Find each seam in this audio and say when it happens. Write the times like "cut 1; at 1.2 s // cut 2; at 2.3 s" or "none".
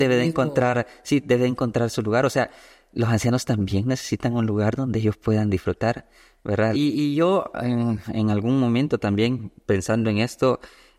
cut 1; at 6.7 s // cut 2; at 8.1 s